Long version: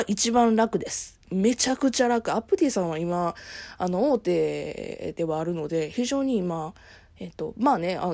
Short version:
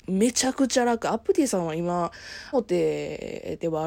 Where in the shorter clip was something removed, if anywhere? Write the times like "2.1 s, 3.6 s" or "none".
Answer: 2.5 s